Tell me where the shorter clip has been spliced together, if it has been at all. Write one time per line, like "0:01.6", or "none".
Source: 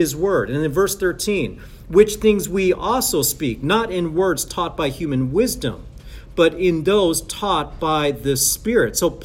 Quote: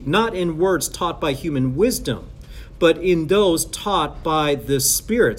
none